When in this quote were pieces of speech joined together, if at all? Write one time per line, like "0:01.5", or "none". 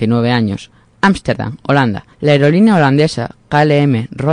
0:02.1